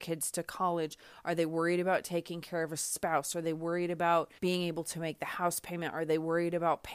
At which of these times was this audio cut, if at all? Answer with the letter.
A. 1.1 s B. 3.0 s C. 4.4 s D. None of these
C